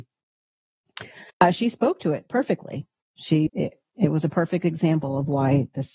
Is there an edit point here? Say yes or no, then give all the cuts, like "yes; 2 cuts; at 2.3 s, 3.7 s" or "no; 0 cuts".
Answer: yes; 2 cuts; at 1.3 s, 3.5 s